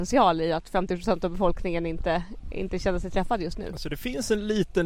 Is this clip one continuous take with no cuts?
yes; 0 cuts

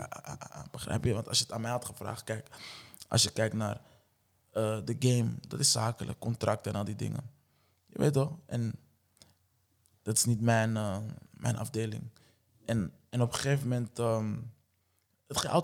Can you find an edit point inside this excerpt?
no; 0 cuts

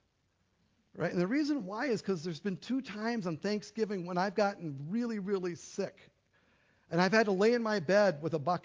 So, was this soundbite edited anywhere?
no; 0 cuts

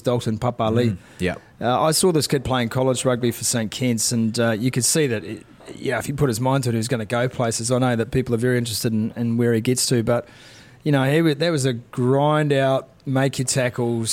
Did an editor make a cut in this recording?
no; 0 cuts

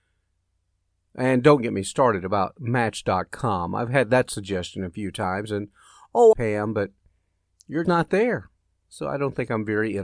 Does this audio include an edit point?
yes; 2 cuts; at 6.3 s, 7.8 s

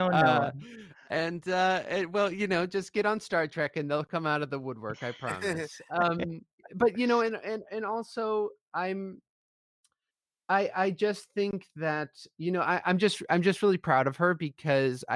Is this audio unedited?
yes; 0 cuts

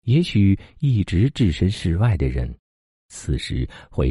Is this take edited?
no; 0 cuts

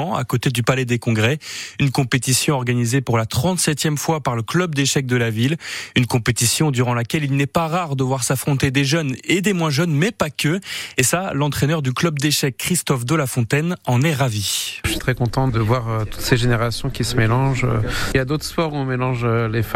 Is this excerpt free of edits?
no; 2 cuts; at 15.0 s, 18.1 s

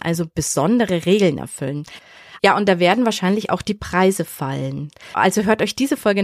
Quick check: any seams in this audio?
yes; 1 cut; at 2.4 s

